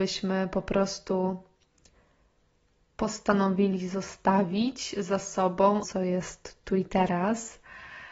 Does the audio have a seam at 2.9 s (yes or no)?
no